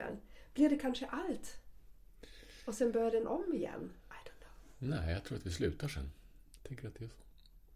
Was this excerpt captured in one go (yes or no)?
no